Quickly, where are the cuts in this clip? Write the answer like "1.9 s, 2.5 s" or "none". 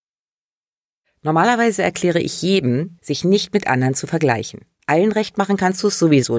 3.0 s, 4.8 s